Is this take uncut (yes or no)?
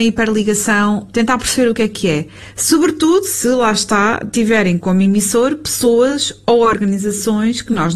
no